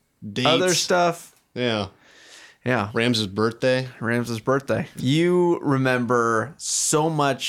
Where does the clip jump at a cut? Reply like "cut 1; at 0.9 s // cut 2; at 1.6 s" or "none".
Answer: cut 1; at 2.9 s // cut 2; at 5.0 s